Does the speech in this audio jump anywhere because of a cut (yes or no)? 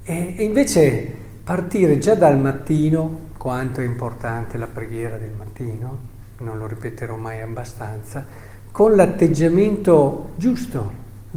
no